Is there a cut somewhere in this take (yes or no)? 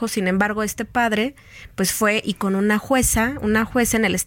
no